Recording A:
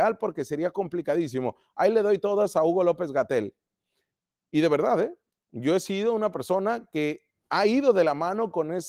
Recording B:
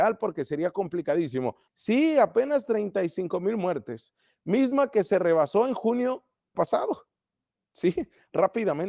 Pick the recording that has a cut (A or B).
B